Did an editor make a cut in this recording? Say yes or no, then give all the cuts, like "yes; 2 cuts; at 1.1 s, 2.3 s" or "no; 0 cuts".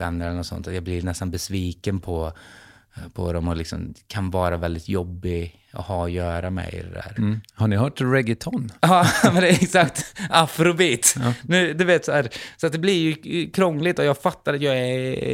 yes; 1 cut; at 7.2 s